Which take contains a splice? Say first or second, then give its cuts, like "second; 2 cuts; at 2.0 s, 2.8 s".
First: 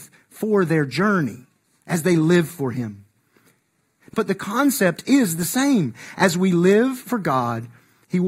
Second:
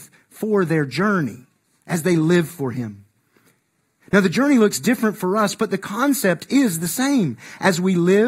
first; 1 cut; at 4.1 s